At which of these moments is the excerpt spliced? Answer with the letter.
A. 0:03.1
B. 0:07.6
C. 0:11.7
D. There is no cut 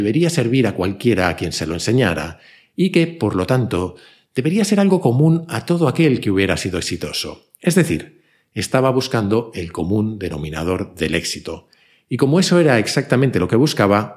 D